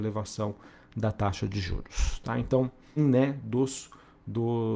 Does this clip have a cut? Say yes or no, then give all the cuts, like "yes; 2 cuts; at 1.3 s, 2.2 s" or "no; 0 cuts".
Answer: yes; 1 cut; at 3.0 s